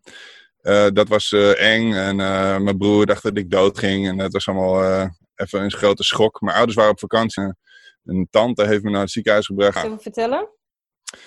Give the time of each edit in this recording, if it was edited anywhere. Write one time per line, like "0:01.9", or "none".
0:07.4
0:09.8